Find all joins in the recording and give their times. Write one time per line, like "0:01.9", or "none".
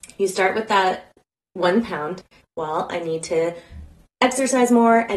0:02.4